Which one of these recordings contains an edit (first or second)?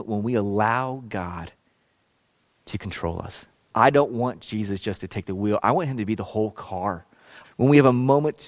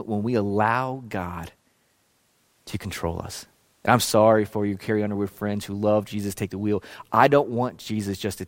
first